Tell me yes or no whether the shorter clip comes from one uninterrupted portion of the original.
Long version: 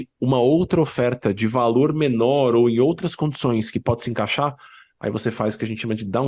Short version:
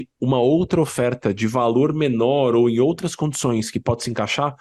yes